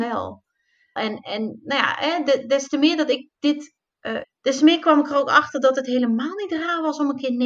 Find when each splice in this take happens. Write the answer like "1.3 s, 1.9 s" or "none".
1.0 s, 4.2 s